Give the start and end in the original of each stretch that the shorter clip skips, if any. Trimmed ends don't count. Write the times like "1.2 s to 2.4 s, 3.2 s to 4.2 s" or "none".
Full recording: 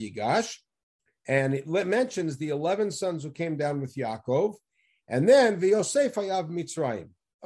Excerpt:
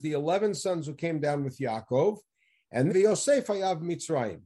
5.3 s to 5.6 s